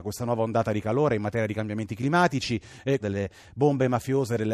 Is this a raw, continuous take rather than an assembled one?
no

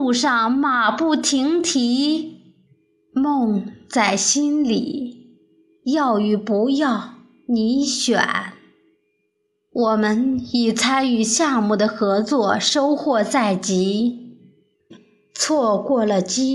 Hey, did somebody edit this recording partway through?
no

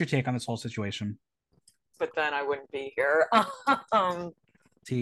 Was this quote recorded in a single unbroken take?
no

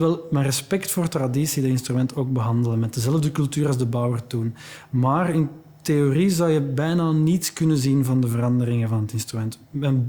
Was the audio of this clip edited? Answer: no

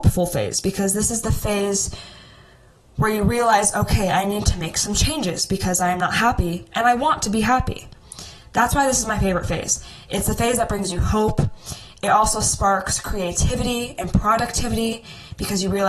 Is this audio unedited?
yes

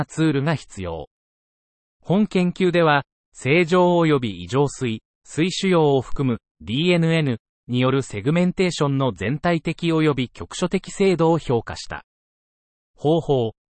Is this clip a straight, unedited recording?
no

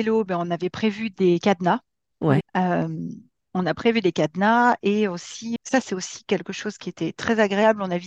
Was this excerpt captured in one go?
no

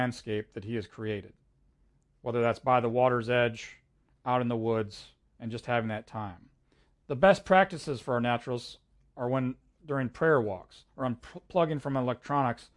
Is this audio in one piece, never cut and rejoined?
yes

